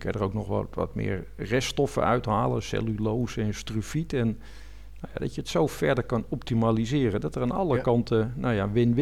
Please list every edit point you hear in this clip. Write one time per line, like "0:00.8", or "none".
none